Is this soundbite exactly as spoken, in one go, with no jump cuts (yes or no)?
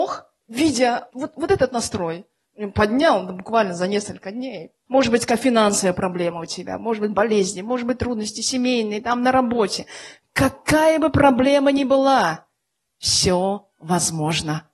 no